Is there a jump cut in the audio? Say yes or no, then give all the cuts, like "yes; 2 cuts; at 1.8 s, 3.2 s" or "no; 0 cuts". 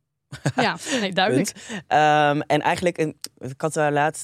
no; 0 cuts